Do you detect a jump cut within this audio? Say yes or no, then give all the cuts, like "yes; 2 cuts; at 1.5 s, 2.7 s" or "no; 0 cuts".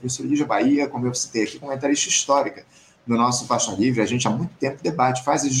no; 0 cuts